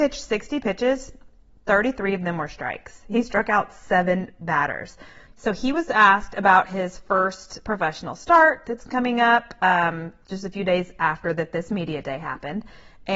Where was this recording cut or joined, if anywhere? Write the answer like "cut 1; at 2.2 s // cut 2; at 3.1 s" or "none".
cut 1; at 5.2 s